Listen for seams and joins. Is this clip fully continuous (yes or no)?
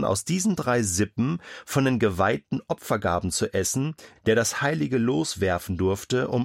no